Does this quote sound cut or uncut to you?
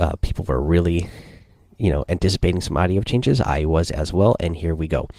uncut